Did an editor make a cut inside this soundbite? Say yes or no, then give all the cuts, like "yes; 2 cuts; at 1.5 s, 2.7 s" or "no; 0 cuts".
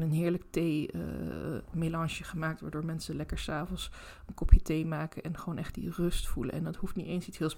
no; 0 cuts